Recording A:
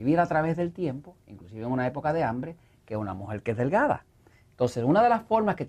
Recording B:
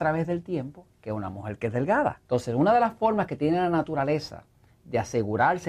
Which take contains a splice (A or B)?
B